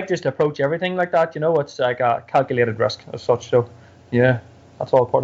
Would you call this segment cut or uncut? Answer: uncut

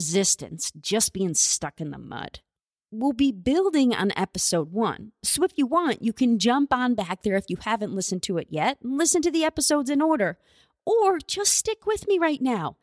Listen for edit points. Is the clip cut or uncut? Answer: uncut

